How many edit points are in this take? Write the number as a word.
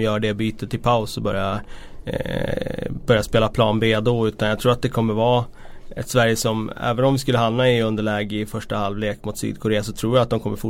zero